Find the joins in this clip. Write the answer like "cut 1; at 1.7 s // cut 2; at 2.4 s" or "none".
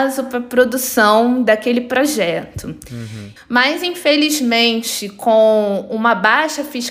cut 1; at 3.4 s